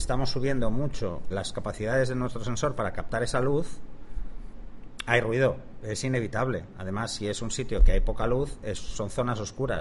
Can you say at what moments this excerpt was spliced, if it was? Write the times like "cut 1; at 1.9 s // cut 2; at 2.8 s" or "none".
cut 1; at 1.3 s